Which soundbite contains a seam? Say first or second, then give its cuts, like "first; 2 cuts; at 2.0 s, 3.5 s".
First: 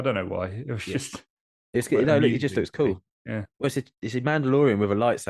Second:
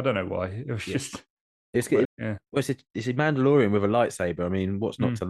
second; 1 cut; at 2.0 s